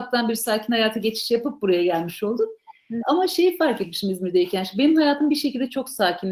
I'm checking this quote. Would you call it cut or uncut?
cut